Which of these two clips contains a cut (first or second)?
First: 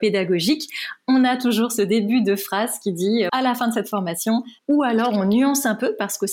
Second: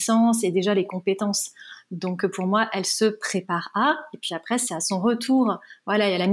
first